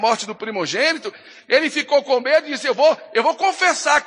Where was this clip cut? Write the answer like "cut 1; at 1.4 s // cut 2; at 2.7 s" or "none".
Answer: none